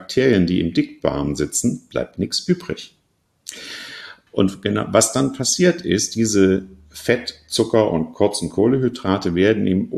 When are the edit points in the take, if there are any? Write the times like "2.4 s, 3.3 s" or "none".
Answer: 4.3 s

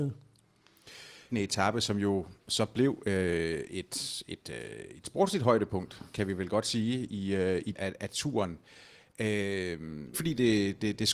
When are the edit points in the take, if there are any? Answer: 1.3 s, 7.7 s, 10.1 s

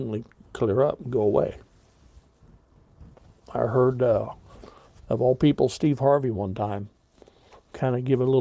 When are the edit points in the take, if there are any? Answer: none

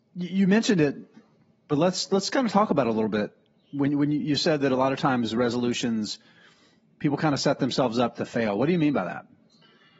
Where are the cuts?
none

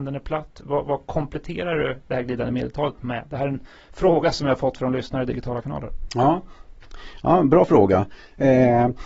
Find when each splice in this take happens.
none

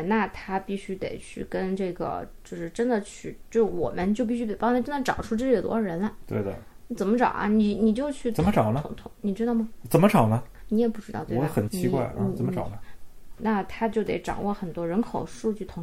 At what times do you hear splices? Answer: 11.7 s, 13.4 s

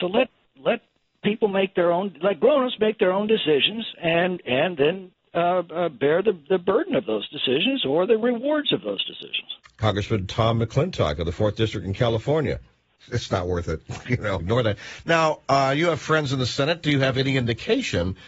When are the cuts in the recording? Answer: 13.0 s, 14.4 s

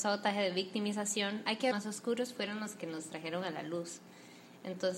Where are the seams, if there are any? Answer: 1.7 s

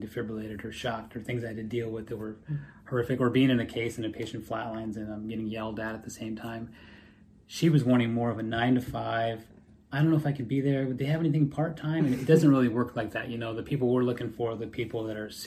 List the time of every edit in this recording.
none

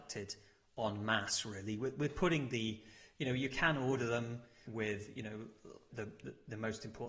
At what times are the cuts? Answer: 4.7 s, 5.9 s

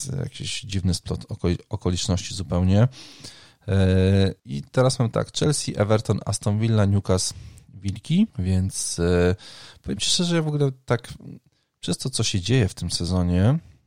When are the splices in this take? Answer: 4.4 s, 8.3 s

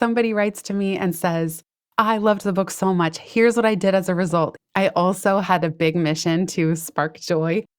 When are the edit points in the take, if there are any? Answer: 4.6 s

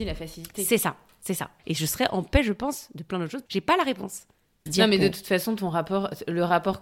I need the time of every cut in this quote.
1.6 s, 3.5 s

